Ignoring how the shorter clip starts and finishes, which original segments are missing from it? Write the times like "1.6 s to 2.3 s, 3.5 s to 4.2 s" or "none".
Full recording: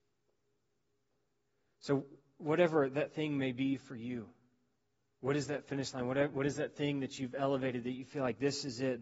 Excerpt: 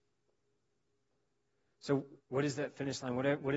2.2 s to 5.1 s